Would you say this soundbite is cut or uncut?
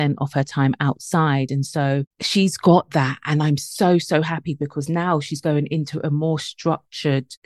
uncut